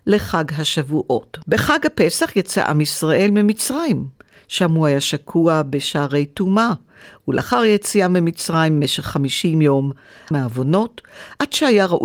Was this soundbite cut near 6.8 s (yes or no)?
no